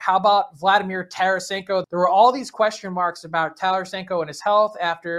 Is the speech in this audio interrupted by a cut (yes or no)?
yes